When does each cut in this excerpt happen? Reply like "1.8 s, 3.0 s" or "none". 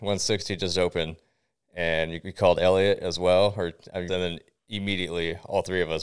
4.1 s